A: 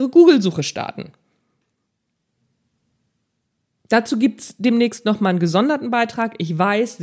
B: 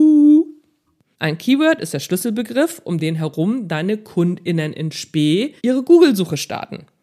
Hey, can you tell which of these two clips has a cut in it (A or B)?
B